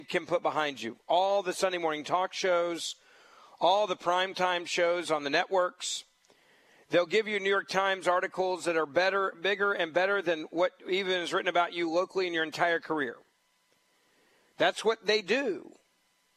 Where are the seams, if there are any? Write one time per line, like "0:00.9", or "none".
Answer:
none